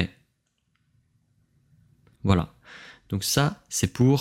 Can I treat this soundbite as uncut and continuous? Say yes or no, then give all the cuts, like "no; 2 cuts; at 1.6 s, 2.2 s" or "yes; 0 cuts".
no; 1 cut; at 2.2 s